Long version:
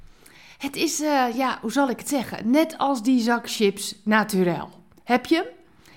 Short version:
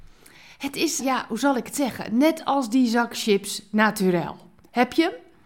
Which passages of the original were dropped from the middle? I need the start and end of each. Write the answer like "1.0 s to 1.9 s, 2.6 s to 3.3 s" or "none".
1.0 s to 1.3 s

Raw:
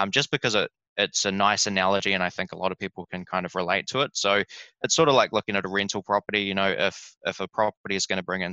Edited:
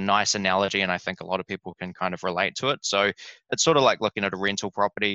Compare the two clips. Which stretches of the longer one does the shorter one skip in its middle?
none

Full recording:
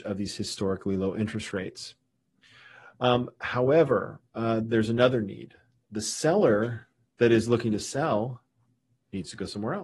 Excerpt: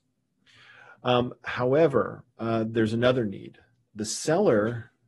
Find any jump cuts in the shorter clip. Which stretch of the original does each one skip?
none

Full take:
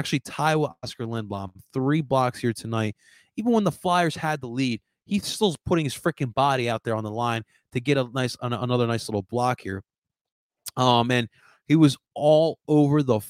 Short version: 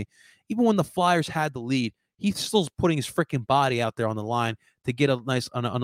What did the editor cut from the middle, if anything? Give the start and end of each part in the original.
none

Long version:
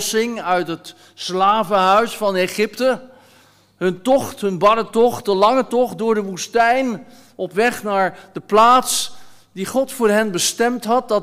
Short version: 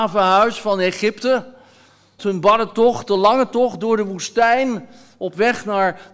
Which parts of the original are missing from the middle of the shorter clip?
3.7 s to 4.4 s

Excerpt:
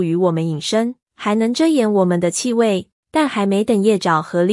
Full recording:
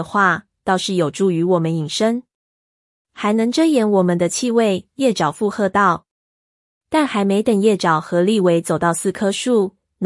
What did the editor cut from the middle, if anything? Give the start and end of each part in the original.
2.3 s to 3.0 s, 4.9 s to 6.7 s

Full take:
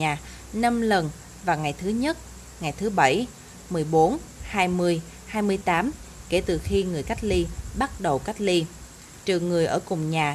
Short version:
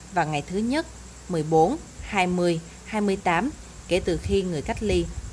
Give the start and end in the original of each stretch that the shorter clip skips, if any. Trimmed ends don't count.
2.6 s to 3.7 s

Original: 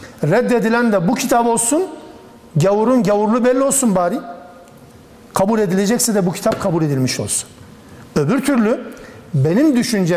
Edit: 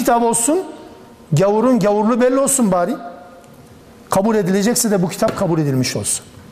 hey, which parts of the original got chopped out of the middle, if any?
none

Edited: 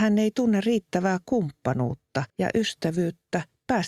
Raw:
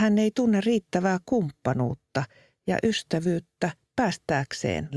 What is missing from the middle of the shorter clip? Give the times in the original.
2.3 s to 2.6 s

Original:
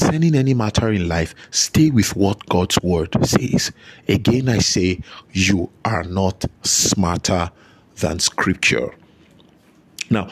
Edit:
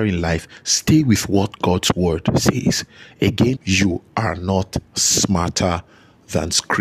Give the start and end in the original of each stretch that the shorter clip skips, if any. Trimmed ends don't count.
4.4 s to 5.2 s

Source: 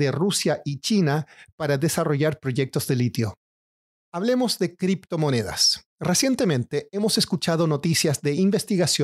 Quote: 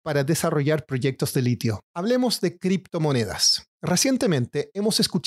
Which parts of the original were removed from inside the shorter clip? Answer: 3.4 s to 4.0 s

